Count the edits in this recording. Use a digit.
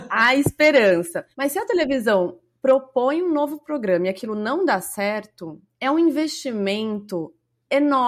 1